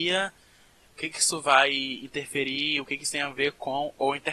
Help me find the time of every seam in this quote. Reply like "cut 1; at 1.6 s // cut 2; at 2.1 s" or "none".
none